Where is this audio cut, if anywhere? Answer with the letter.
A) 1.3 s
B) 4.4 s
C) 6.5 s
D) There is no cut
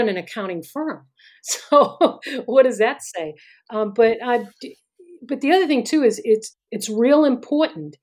C